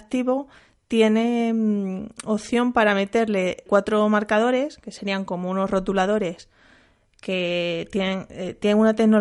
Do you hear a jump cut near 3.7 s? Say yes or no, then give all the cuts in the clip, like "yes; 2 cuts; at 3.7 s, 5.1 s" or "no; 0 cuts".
yes; 1 cut; at 3.7 s